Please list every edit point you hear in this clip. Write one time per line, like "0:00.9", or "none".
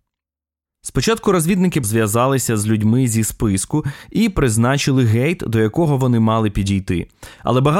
0:01.8